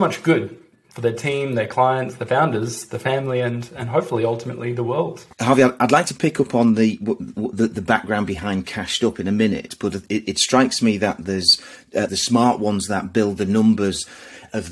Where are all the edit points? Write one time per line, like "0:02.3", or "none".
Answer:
0:05.3
0:12.1